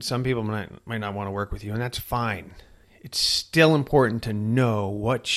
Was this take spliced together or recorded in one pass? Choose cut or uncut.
uncut